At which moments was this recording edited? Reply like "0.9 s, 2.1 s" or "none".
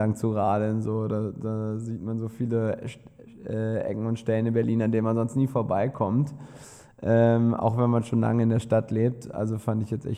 none

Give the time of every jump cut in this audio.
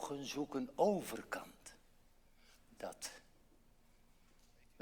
2.6 s

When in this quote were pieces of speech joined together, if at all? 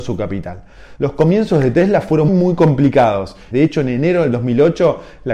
1.0 s, 2.3 s, 3.5 s

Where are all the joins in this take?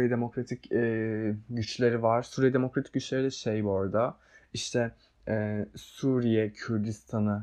none

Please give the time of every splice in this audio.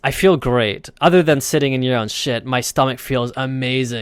none

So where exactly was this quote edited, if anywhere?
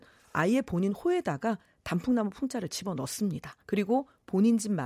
3.6 s

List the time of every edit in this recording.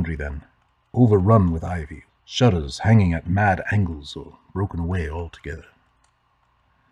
2.1 s

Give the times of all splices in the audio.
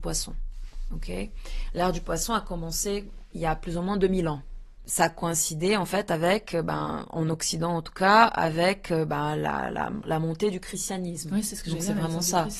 none

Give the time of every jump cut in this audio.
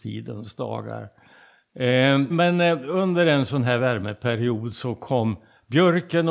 2.3 s

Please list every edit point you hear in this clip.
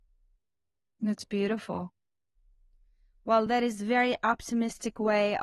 none

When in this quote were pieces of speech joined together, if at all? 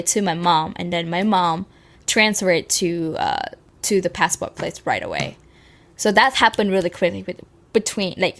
none

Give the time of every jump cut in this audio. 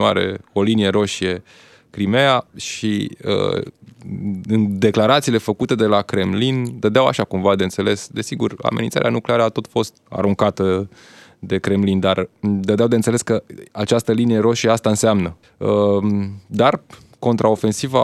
9.9 s, 15.4 s

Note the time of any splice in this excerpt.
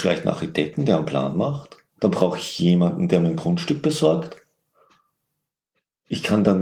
2.0 s

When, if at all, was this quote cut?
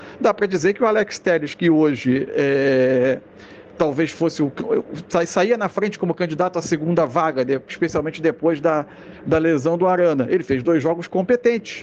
none

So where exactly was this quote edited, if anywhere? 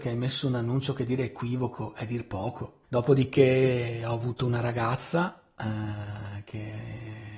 2.8 s

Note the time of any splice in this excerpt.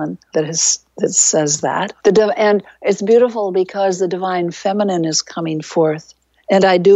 2.0 s

